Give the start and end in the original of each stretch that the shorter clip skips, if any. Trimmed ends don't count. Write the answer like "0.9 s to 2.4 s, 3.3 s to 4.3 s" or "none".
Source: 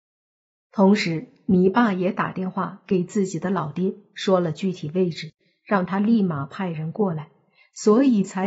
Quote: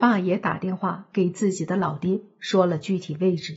none